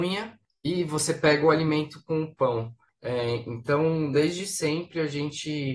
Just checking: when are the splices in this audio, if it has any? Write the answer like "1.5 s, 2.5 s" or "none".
none